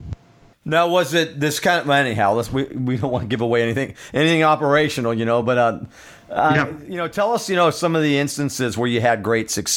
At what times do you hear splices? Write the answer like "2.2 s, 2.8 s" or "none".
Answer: none